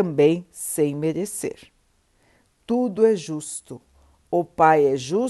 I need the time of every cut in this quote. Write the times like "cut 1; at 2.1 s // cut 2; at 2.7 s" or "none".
none